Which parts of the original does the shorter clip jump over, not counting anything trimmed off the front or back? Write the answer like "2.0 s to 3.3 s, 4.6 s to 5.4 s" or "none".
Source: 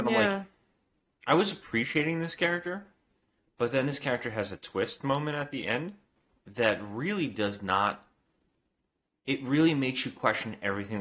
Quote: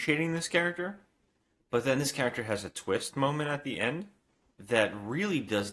none